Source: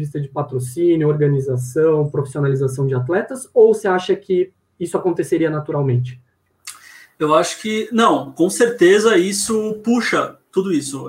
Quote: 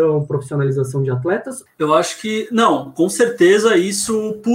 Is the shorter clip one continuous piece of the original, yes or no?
no